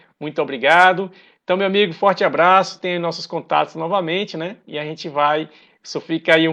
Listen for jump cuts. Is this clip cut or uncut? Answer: uncut